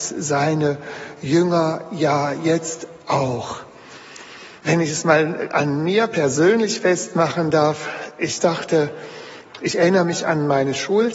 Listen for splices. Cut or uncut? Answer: cut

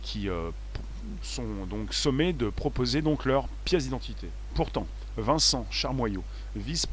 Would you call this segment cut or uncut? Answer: cut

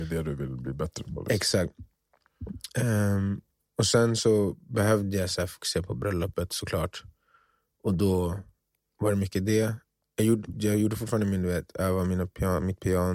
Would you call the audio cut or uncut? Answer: uncut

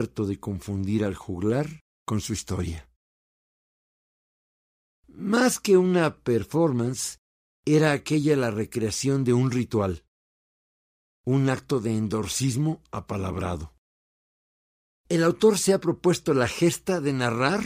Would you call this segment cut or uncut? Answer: uncut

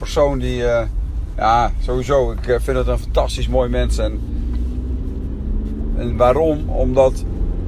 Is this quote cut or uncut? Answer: uncut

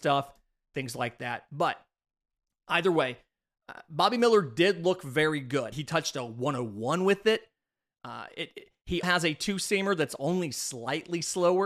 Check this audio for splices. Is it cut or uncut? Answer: cut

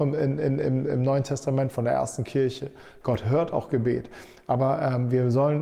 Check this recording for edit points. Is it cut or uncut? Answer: cut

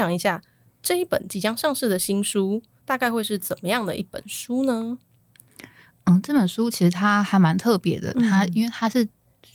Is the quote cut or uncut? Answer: uncut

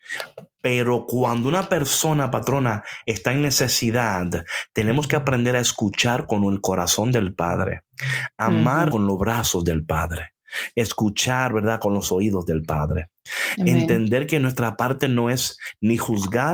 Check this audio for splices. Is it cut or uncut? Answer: cut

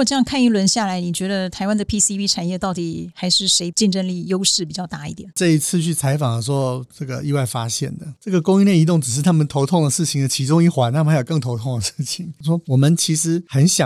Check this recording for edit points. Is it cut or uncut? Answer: cut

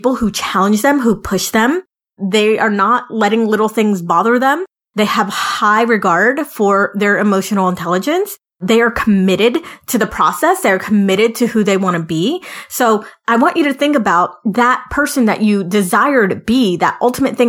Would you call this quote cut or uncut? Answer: uncut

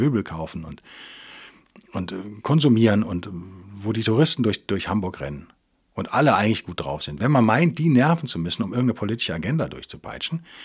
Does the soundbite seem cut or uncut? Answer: uncut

